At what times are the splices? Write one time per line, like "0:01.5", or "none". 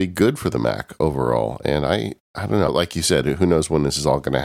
0:02.7